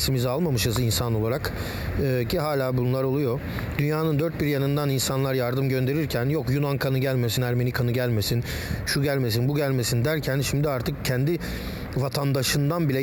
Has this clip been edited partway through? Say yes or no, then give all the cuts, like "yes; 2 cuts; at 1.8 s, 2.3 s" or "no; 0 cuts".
no; 0 cuts